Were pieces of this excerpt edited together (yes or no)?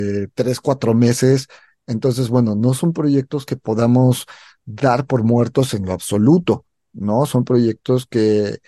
no